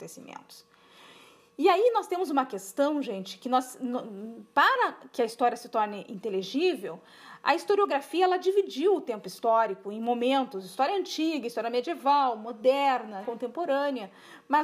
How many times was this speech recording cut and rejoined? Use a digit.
1